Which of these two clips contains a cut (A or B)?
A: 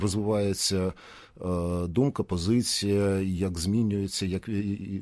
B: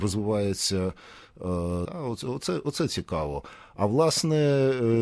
B